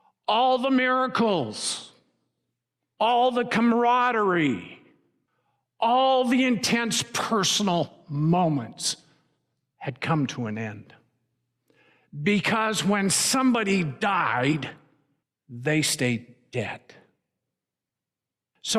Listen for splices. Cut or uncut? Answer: uncut